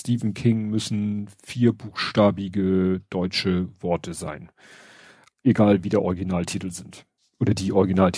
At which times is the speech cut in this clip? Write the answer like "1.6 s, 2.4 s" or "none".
7.2 s